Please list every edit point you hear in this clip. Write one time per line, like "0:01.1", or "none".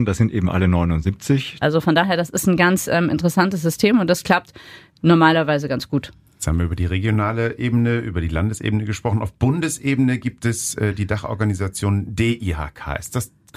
0:01.6